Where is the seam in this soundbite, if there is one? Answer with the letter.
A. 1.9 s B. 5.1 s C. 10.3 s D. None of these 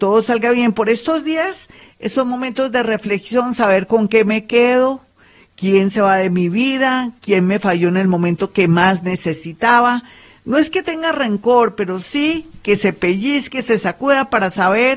D